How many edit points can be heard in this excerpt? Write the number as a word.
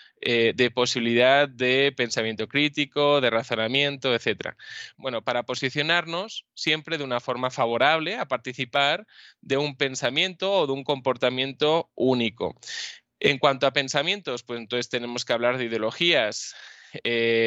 one